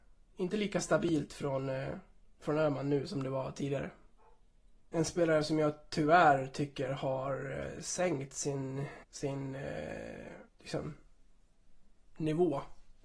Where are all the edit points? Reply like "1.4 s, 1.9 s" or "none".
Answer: 4.9 s, 9.0 s, 10.5 s